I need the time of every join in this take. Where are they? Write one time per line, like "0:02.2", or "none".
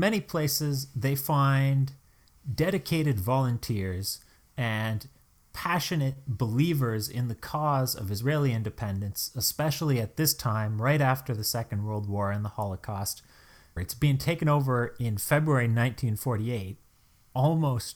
0:13.8